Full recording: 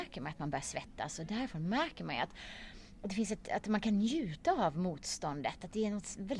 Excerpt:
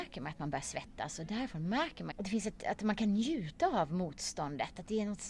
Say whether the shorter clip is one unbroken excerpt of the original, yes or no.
no